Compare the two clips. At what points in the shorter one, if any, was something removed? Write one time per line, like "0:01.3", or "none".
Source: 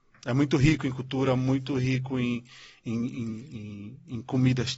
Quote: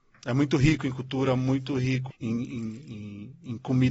0:02.1